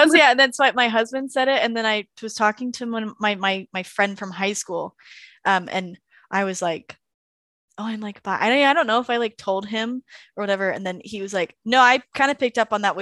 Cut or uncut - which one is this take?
uncut